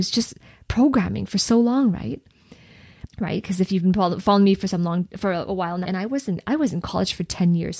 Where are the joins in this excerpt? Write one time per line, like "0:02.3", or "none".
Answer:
0:03.1
0:05.9